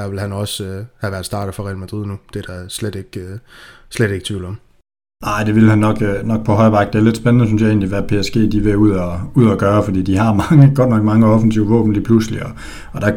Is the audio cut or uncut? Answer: uncut